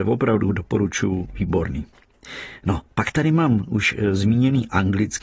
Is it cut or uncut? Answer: uncut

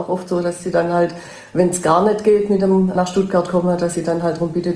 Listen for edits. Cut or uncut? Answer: uncut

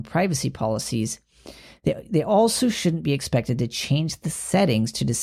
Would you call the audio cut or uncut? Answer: uncut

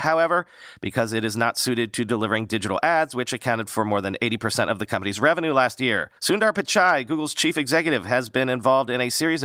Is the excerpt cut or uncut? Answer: cut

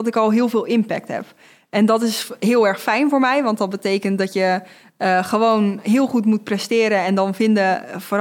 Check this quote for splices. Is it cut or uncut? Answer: uncut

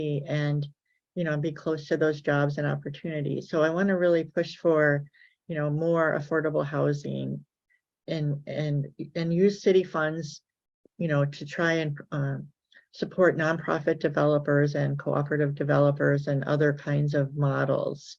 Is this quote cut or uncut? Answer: uncut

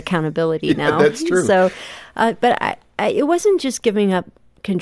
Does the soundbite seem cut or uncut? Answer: uncut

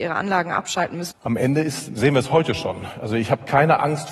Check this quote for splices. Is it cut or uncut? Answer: cut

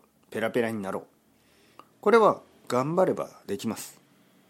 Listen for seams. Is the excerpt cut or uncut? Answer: uncut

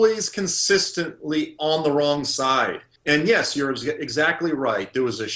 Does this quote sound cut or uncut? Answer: cut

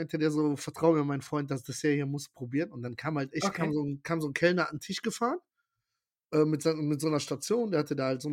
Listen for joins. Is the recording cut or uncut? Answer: uncut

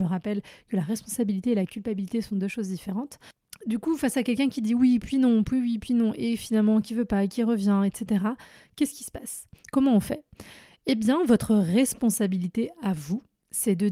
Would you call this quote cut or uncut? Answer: uncut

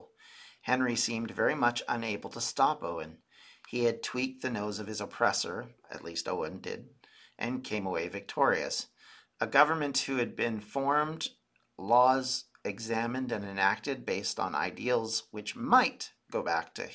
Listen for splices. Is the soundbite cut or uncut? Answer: uncut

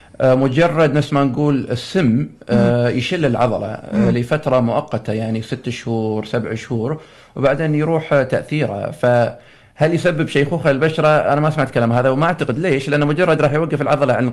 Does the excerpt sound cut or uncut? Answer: uncut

